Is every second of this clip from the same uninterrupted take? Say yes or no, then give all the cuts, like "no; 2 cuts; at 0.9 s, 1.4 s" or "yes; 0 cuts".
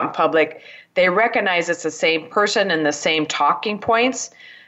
yes; 0 cuts